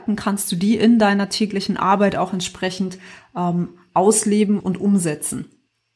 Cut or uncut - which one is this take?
cut